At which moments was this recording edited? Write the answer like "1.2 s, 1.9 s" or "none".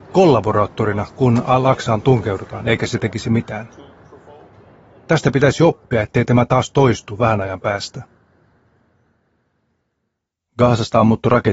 none